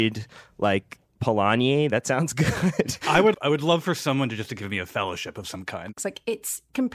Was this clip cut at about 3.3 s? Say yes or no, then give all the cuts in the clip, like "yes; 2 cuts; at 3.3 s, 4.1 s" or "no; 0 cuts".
yes; 2 cuts; at 3.3 s, 6.0 s